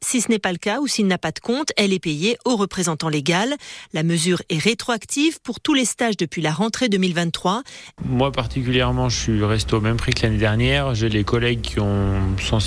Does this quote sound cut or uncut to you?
cut